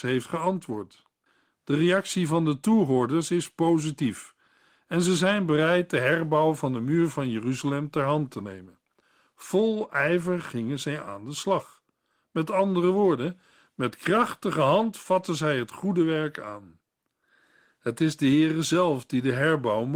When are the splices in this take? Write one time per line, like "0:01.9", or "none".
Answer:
none